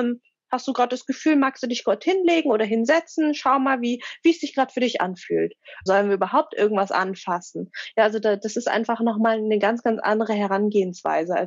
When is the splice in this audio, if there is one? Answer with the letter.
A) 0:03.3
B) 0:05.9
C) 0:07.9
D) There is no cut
B